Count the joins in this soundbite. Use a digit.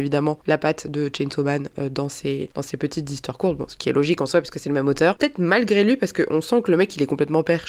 1